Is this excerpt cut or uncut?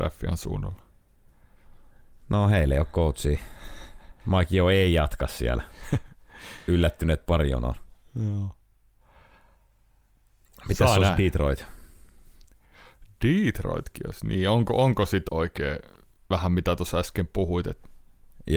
cut